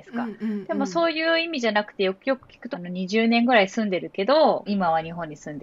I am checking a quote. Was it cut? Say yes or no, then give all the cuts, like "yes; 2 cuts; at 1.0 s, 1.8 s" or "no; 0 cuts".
yes; 2 cuts; at 2.7 s, 4.7 s